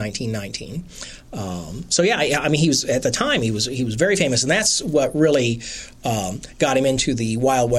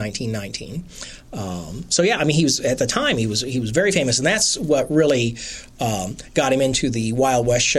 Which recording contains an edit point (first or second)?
second